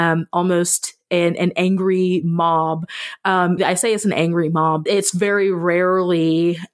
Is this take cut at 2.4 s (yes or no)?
no